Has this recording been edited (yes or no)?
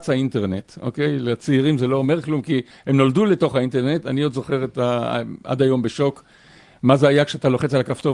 no